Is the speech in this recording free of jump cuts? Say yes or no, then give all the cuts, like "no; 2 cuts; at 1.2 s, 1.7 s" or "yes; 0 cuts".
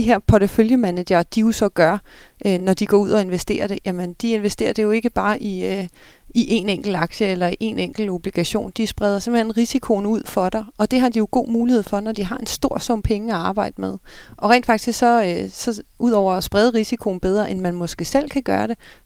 yes; 0 cuts